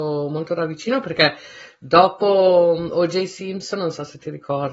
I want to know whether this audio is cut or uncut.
uncut